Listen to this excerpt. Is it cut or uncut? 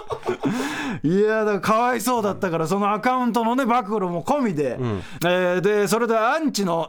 cut